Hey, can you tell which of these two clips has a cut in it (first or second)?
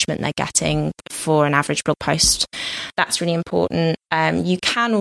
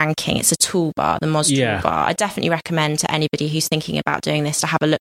first